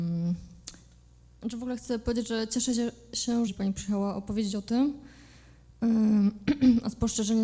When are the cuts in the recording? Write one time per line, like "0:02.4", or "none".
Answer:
0:01.4
0:03.5